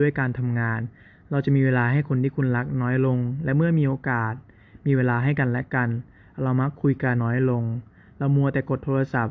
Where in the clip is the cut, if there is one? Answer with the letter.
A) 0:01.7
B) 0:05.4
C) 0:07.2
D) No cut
C